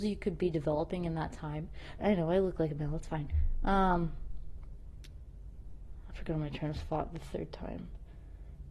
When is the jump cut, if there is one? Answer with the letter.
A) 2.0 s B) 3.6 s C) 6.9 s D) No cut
A